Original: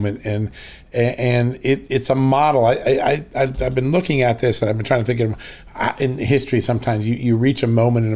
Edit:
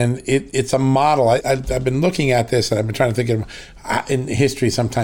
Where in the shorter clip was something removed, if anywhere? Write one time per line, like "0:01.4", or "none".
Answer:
0:01.4